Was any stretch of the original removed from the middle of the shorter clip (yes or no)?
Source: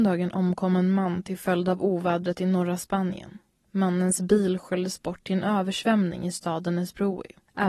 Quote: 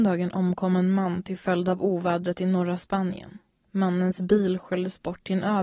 no